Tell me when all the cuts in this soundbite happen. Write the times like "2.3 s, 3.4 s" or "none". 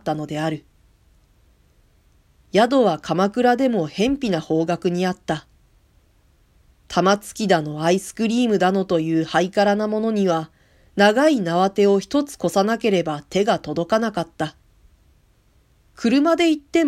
none